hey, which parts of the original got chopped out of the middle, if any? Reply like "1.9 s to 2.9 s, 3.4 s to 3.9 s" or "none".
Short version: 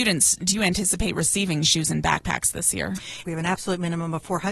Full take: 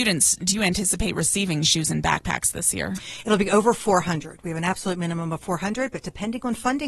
3.2 s to 4.4 s